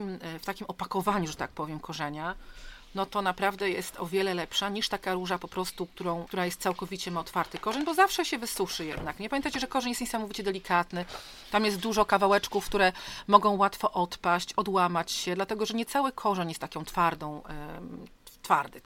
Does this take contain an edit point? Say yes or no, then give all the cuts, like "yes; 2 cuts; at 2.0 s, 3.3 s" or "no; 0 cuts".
yes; 1 cut; at 6.3 s